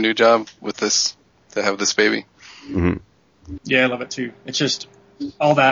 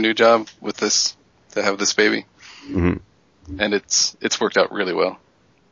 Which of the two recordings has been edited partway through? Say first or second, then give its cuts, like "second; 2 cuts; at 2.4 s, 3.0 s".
first; 1 cut; at 3.6 s